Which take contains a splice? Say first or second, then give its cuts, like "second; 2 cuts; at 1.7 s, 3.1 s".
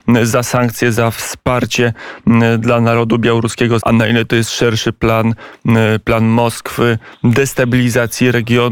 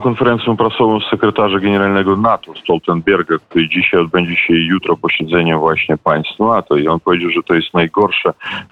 first; 1 cut; at 3.8 s